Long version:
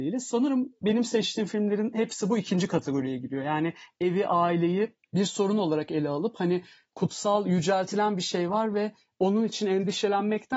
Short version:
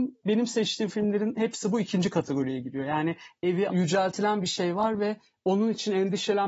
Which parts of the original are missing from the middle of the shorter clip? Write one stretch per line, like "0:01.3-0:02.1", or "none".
0:04.3-0:07.4